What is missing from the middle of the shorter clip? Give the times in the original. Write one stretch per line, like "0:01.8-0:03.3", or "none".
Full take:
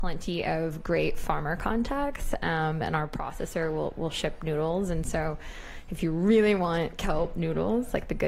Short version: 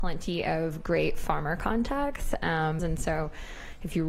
0:02.8-0:04.9